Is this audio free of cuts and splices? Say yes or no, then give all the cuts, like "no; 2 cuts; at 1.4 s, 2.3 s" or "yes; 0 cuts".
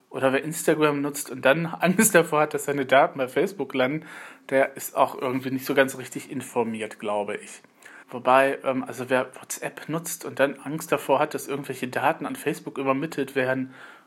no; 1 cut; at 8.0 s